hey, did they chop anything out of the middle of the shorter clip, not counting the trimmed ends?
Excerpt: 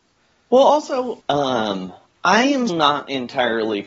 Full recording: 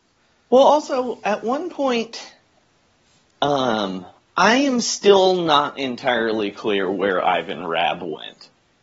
yes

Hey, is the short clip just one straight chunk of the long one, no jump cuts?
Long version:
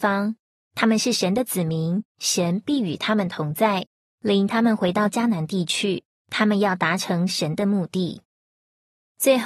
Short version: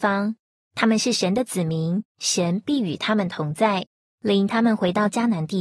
yes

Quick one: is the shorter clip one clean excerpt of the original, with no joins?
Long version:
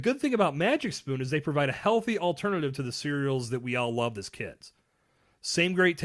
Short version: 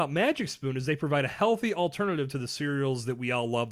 yes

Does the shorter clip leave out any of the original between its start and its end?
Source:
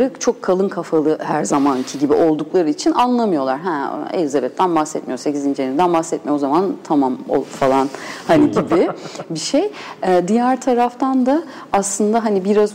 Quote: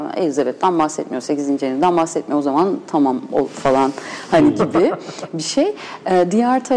no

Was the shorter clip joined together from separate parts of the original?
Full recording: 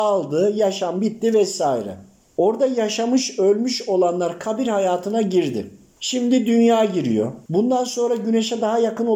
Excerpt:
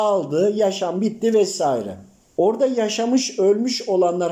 no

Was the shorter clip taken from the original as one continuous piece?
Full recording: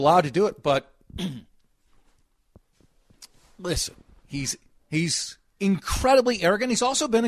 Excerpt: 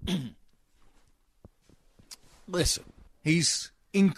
no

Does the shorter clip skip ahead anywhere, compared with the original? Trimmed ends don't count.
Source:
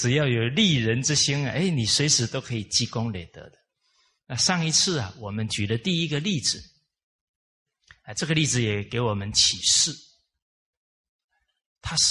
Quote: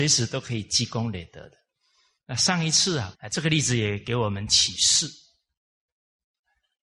yes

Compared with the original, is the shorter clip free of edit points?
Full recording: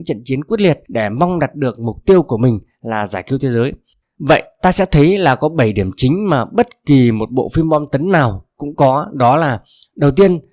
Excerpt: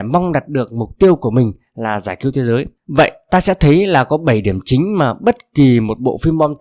no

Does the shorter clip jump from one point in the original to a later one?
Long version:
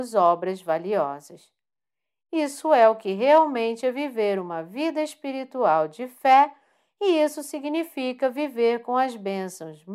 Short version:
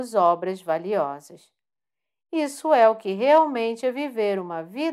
no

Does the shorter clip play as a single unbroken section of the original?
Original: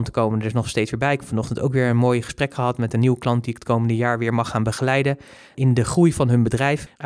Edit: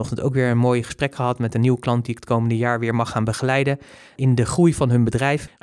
yes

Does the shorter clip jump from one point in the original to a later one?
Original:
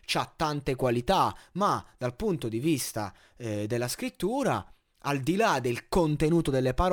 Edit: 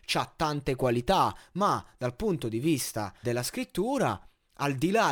yes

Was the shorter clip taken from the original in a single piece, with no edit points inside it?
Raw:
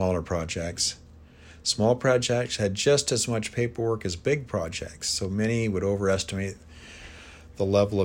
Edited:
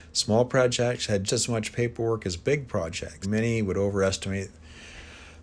no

